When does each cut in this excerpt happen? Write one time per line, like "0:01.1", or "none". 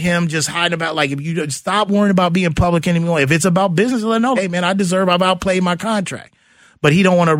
0:04.4